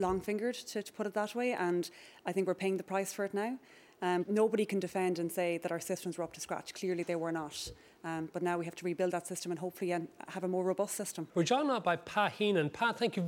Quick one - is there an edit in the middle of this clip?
yes; 2 cuts; at 4.2 s, 11.3 s

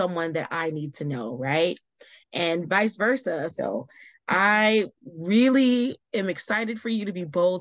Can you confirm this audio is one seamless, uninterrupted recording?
no; 1 cut; at 3.5 s

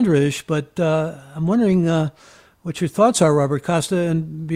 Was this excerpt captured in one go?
yes; 0 cuts

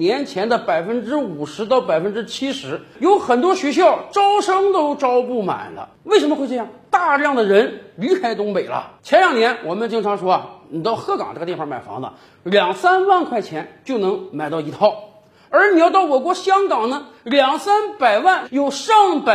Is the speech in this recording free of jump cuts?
no; 1 cut; at 18.4 s

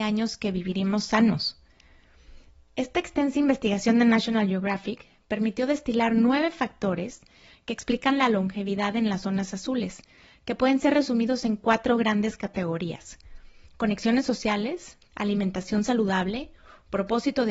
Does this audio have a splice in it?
yes; 1 cut; at 15.0 s

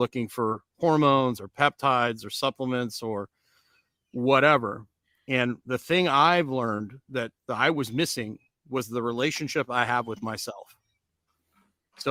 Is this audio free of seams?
yes; 0 cuts

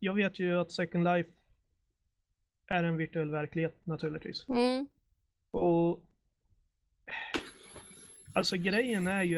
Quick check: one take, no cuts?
yes; 0 cuts

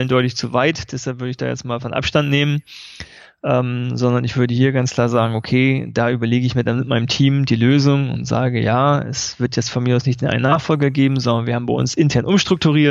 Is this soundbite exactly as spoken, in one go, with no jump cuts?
yes; 0 cuts

